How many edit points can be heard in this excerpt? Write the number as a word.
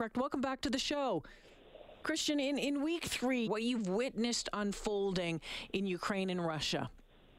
two